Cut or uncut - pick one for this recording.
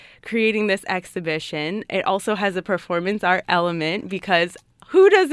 uncut